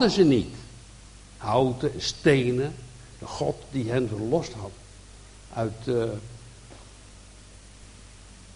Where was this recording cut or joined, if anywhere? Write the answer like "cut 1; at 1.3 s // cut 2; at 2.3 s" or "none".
none